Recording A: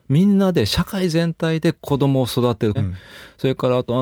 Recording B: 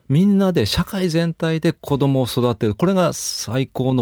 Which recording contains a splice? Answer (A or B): A